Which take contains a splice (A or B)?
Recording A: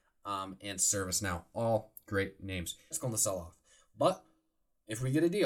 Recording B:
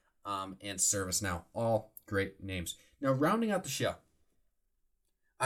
A